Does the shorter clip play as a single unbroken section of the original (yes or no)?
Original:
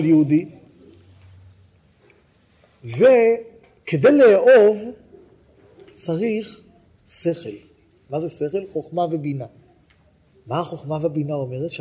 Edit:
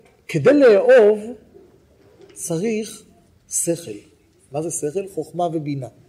yes